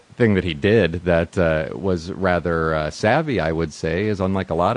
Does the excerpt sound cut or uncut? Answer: uncut